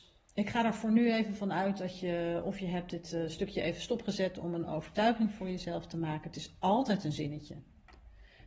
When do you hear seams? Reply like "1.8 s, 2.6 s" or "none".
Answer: none